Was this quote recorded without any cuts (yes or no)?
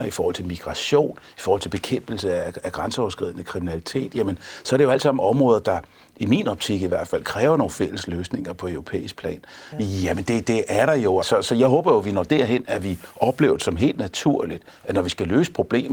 no